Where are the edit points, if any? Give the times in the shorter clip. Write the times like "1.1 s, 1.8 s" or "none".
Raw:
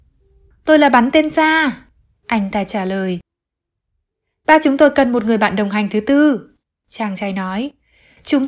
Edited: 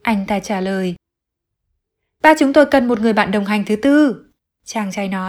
none